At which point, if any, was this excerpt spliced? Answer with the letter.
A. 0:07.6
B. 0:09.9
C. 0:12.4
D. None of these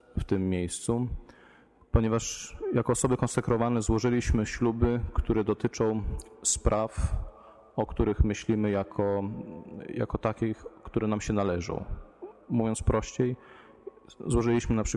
D